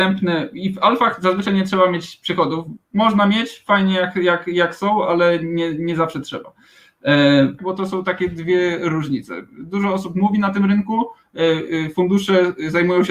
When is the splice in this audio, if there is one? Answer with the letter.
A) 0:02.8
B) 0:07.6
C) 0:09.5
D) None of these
B